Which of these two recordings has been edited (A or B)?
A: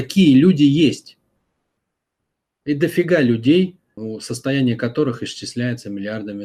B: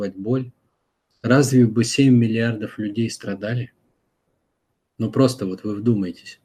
A